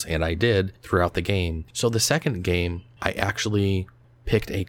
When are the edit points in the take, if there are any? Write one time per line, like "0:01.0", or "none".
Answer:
0:01.7
0:03.0